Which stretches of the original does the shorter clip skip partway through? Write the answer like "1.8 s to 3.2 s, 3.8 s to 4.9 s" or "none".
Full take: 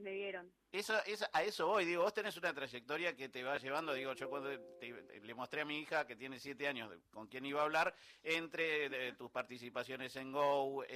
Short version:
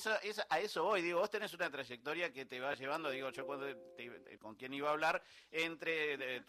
5.2 s to 7.1 s